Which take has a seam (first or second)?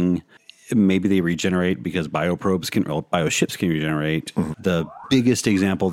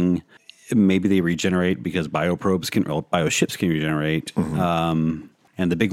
first